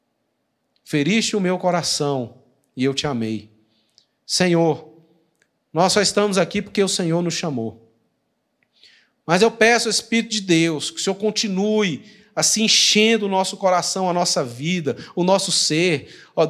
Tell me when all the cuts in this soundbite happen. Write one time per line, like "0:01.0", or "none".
none